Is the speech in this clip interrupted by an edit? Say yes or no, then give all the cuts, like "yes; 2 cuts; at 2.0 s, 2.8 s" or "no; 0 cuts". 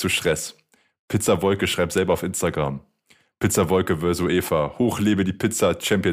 no; 0 cuts